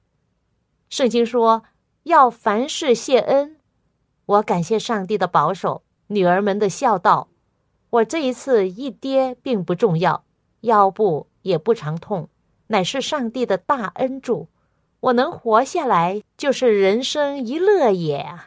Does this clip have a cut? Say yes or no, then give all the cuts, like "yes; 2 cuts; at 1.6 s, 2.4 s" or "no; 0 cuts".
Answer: yes; 1 cut; at 16.2 s